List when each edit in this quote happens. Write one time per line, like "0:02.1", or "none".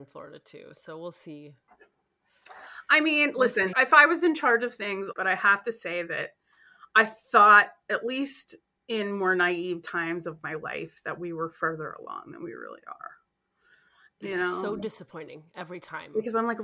0:03.7
0:05.1
0:14.1